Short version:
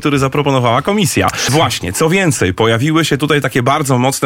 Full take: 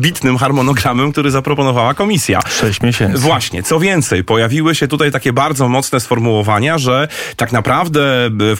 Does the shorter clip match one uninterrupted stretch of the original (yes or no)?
no